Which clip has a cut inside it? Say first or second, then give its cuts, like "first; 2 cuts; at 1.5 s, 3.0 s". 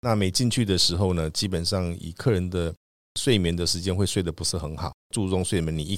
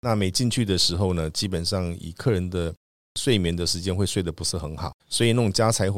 second; 1 cut; at 5.0 s